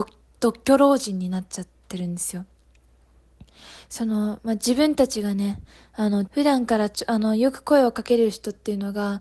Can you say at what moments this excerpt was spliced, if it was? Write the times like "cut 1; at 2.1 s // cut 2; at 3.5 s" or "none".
cut 1; at 6.3 s